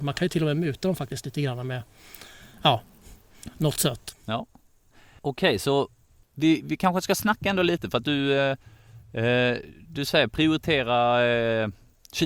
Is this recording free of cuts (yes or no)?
yes